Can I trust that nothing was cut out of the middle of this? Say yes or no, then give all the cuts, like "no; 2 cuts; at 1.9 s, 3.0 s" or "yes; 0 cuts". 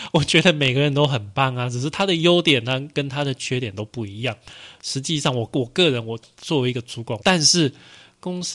no; 1 cut; at 7.2 s